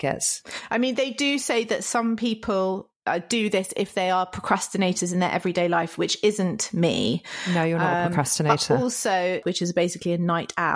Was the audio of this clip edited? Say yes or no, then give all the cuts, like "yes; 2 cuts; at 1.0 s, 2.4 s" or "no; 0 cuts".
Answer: yes; 1 cut; at 9.4 s